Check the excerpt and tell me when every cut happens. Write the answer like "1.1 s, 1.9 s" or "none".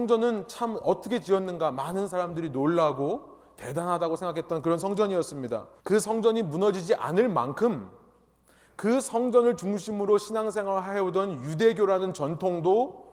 5.8 s